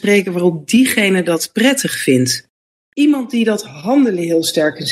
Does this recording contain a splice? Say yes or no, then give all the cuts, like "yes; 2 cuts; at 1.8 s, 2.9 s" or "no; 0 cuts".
no; 0 cuts